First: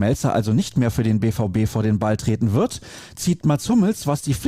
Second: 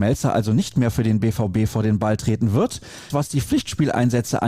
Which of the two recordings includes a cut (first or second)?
second